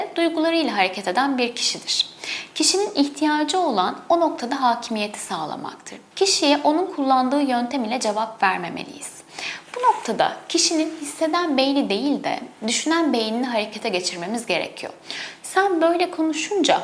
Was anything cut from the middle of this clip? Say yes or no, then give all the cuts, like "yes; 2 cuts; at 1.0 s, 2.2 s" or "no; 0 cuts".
yes; 2 cuts; at 6.1 s, 15.4 s